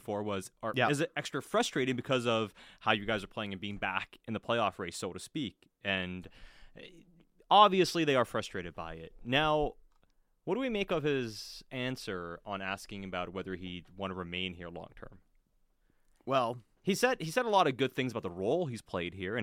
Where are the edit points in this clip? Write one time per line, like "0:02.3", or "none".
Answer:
none